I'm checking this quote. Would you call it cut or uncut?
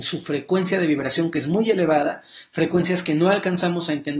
uncut